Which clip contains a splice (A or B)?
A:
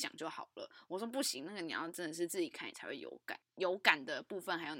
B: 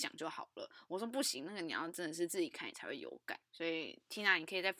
A